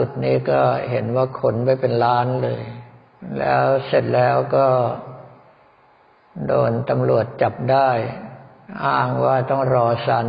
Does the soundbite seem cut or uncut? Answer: uncut